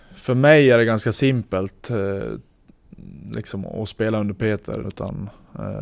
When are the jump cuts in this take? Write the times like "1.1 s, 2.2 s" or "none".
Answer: 4.8 s

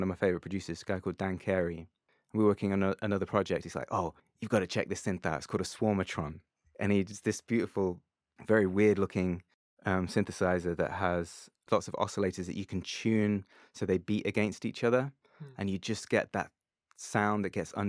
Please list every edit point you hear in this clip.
3.6 s

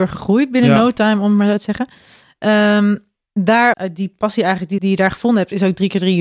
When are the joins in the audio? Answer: 3.7 s, 4.8 s

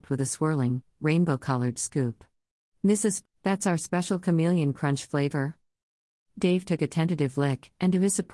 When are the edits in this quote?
3.2 s

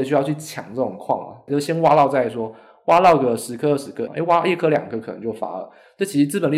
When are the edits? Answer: 4.1 s

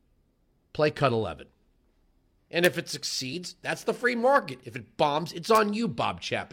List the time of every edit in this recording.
2.4 s

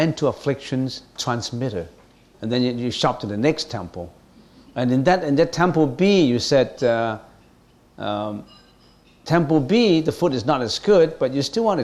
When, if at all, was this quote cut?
2.3 s

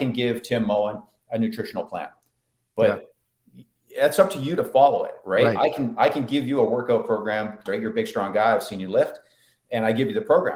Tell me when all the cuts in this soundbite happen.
7.7 s

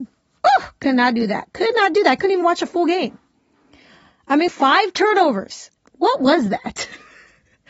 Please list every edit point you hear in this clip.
4.5 s, 5.8 s

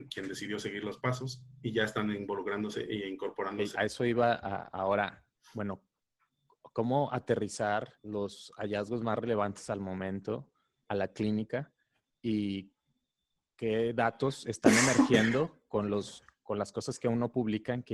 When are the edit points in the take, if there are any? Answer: 3.7 s, 7.9 s

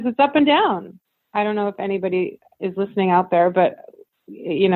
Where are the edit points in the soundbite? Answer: none

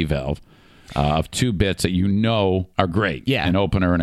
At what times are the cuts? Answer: 2.7 s

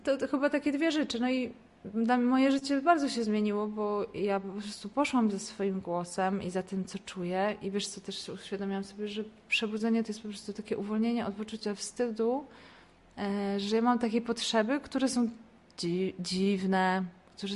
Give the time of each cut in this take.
none

